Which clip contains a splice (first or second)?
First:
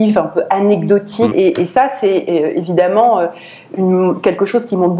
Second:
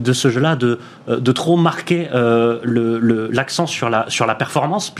first